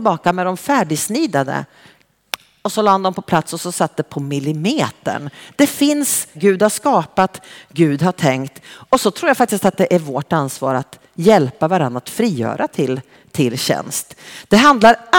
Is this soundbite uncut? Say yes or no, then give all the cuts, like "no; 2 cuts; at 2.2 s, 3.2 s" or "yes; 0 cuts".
no; 1 cut; at 6.4 s